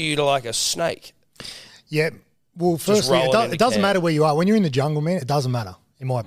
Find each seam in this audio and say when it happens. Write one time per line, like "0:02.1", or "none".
none